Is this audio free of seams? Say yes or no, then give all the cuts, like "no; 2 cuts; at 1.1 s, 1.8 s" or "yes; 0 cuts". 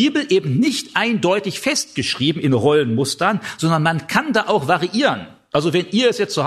yes; 0 cuts